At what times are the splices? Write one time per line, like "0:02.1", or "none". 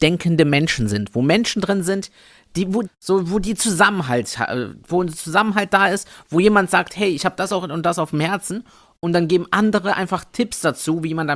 0:02.8